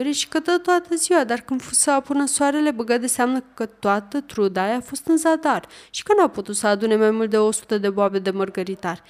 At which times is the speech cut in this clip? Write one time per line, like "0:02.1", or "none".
none